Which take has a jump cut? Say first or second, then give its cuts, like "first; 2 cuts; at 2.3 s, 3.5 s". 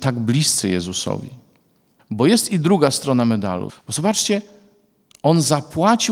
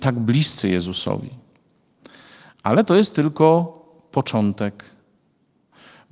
first; 2 cuts; at 2.0 s, 3.7 s